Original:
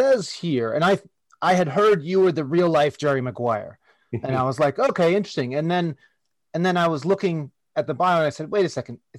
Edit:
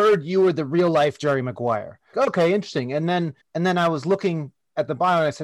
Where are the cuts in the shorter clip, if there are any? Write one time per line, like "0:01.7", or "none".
0:02.1
0:03.4